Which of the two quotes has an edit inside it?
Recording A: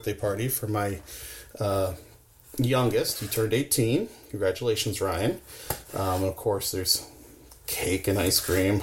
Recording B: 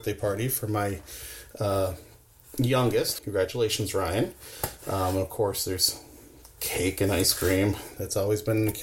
B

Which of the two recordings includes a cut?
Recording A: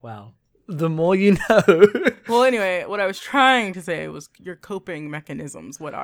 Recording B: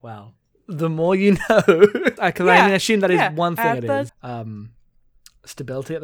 B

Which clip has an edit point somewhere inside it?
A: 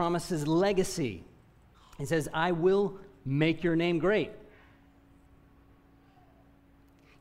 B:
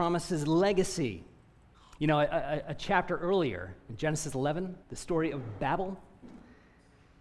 B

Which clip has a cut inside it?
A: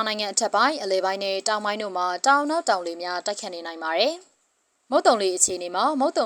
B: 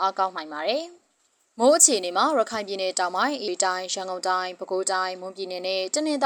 B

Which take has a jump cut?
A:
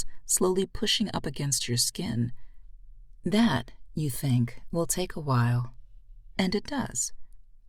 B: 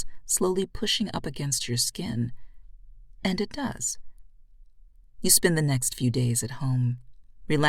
B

